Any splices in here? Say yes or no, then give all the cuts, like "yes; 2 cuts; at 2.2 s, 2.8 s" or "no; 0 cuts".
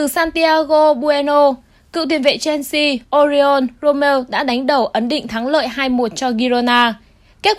no; 0 cuts